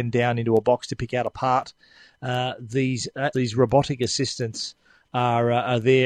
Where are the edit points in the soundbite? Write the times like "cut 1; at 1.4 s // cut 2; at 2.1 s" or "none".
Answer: cut 1; at 3.3 s